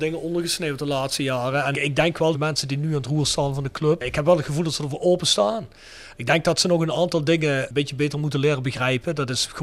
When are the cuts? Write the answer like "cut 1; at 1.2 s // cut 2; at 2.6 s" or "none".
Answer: none